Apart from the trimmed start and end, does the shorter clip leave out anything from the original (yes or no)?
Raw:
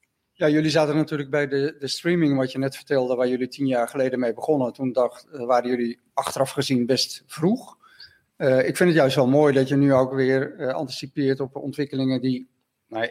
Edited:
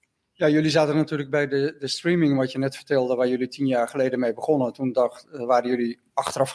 no